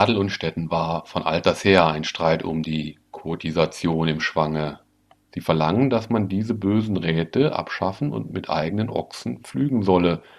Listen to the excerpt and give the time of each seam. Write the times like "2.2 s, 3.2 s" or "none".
5.2 s